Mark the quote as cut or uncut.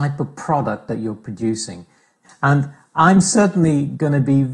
cut